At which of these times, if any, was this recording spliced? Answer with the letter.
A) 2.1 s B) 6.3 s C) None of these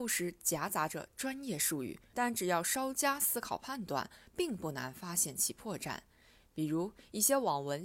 A